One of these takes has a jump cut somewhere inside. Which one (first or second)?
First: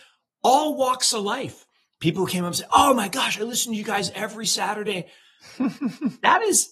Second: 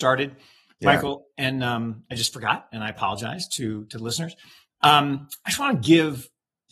first